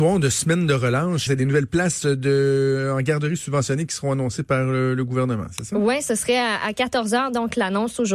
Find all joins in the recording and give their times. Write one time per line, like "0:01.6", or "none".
0:01.3